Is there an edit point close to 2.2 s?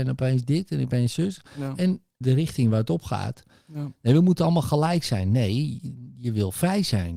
yes; 1 cut; at 2.2 s

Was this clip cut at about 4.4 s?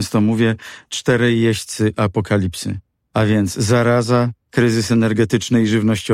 yes; 1 cut; at 4.4 s

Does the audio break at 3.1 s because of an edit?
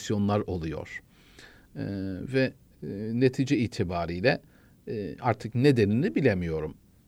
no; 0 cuts

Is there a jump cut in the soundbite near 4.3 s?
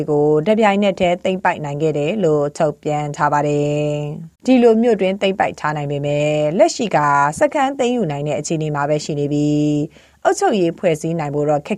yes; 1 cut; at 4.3 s

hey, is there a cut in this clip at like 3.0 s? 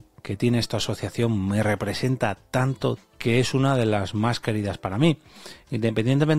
yes; 1 cut; at 3.0 s

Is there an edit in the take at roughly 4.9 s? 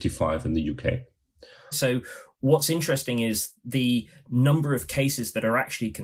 no; 1 cut; at 1.7 s

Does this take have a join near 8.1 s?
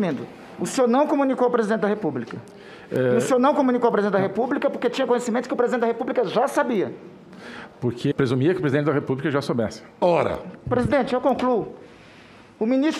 yes; 2 cuts; at 8.1 s, 10.0 s

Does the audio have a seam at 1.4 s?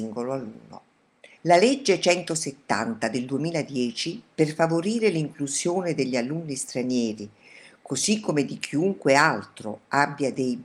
yes; 1 cut; at 1.4 s

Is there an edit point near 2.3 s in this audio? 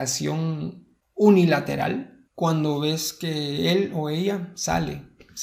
yes; 1 cut; at 2.3 s

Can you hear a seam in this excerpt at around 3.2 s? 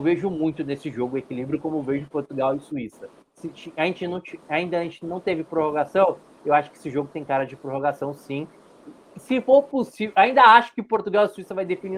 yes; 1 cut; at 3.2 s

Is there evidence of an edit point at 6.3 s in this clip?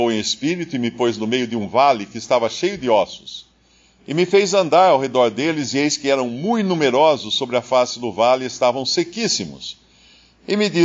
no; 0 cuts

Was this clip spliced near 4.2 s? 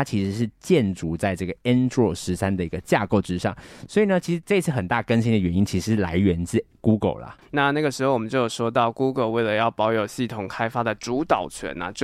no; 1 cut; at 7.4 s

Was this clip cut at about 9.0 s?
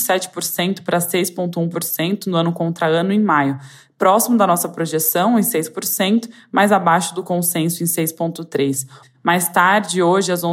yes; 1 cut; at 9.0 s

